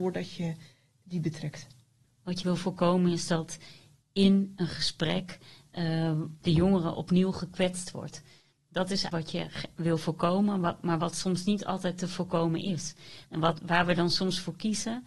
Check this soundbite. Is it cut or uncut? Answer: cut